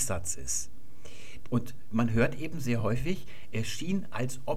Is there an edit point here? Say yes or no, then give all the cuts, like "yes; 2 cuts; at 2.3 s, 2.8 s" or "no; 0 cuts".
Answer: yes; 1 cut; at 1.4 s